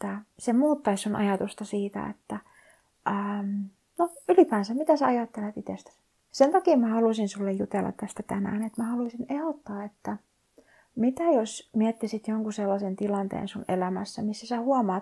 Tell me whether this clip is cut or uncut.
cut